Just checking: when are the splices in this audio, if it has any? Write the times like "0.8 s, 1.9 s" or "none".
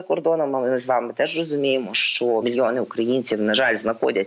2.4 s